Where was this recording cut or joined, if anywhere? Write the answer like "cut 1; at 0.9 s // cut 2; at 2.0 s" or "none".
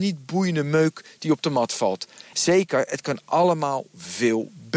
cut 1; at 2.3 s

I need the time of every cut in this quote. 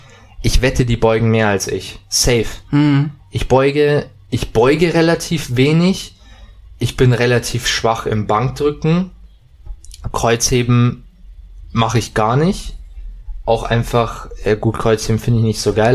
none

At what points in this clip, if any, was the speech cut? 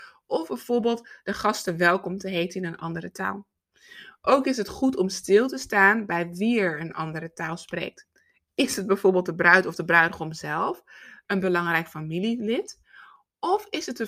none

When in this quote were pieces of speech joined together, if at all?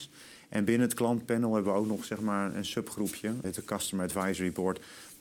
cut 1; at 3.4 s

